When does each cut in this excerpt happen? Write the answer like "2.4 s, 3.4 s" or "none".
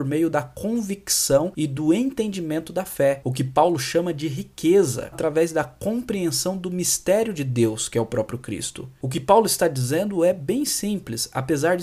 5.1 s